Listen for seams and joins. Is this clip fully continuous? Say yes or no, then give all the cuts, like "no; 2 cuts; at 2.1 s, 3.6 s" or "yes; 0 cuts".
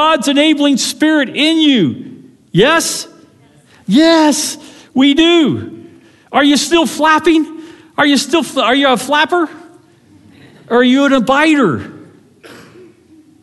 yes; 0 cuts